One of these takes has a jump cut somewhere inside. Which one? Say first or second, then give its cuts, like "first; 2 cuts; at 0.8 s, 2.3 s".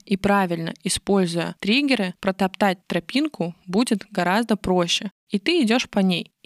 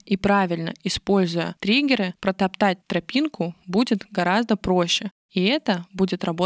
first; 1 cut; at 5.2 s